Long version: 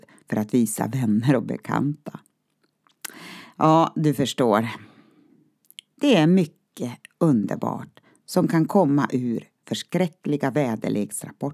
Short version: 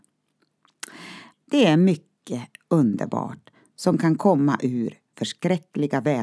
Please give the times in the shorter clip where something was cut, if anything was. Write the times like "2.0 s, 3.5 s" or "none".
1.3 s